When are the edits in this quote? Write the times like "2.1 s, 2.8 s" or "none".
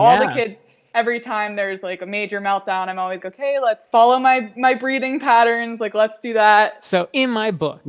3.2 s